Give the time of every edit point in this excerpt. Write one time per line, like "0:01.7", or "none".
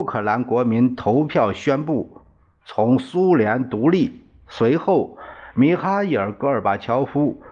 none